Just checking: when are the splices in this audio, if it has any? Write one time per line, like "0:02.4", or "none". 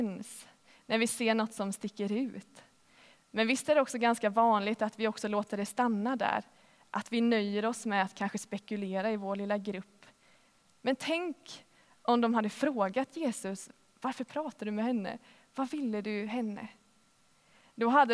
none